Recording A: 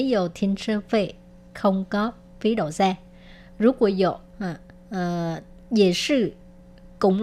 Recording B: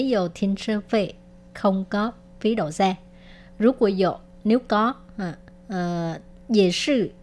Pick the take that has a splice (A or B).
A